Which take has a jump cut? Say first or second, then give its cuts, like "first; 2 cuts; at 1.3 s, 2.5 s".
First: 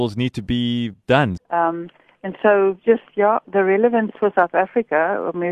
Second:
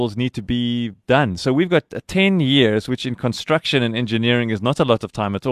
first; 1 cut; at 1.4 s